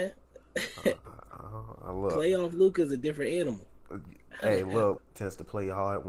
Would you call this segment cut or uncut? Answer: cut